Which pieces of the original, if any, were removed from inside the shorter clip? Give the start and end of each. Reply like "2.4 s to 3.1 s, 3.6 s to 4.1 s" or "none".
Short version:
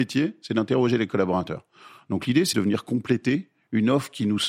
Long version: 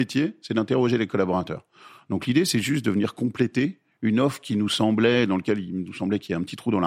2.5 s to 2.8 s